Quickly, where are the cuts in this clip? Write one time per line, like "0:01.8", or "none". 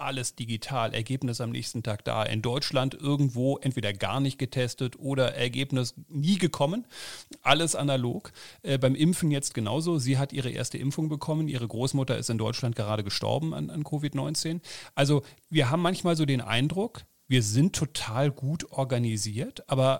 none